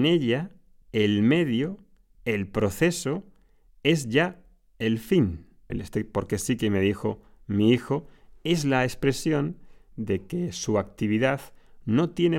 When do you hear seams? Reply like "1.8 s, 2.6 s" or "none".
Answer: 5.7 s